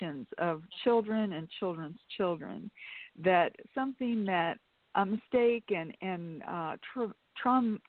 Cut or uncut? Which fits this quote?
uncut